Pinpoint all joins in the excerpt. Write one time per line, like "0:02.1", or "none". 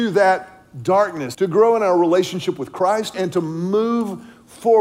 0:01.3
0:03.1